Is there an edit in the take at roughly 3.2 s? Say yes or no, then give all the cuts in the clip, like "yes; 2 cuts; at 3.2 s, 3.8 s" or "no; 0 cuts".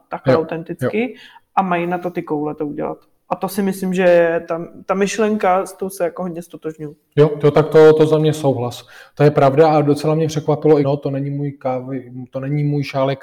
no; 1 cut; at 10.8 s